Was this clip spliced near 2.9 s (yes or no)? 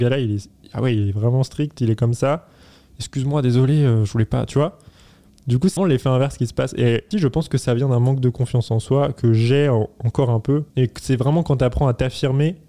no